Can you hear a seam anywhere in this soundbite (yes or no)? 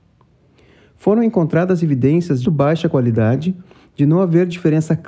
yes